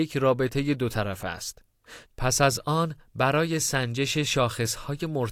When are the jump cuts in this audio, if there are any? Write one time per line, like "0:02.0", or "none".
0:02.0